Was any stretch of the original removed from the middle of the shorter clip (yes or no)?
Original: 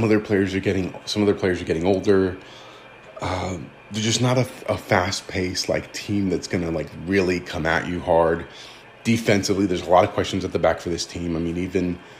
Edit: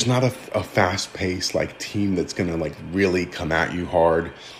no